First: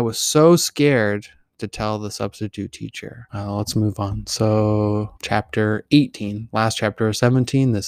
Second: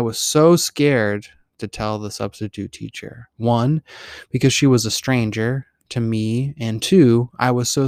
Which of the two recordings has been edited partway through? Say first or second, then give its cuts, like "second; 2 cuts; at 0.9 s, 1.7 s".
first; 2 cuts; at 3.3 s, 5.2 s